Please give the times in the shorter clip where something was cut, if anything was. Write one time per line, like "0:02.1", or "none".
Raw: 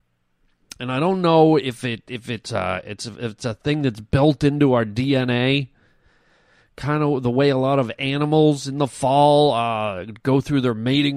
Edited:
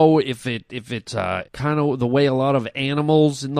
0:01.4